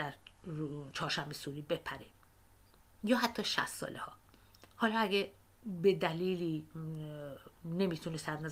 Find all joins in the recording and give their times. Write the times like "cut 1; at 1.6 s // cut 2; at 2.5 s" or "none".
cut 1; at 4.7 s